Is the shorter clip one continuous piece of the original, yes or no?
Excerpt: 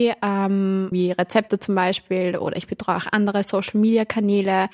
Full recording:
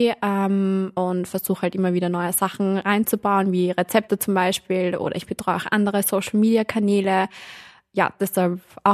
no